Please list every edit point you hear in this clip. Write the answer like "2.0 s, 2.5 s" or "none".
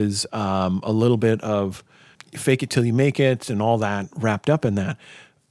2.2 s

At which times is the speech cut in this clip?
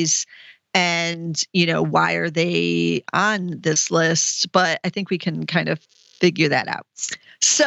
none

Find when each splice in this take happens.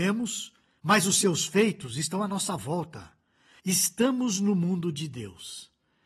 none

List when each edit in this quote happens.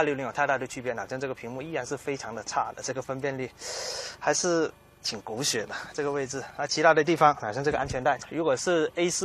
none

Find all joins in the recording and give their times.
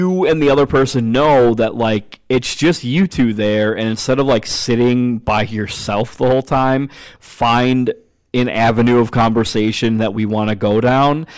7.2 s

